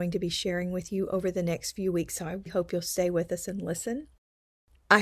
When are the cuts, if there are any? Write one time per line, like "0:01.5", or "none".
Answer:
0:02.5